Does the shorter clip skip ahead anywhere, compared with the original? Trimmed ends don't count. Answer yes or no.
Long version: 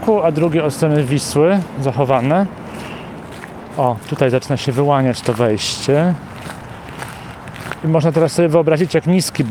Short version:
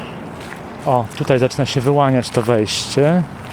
no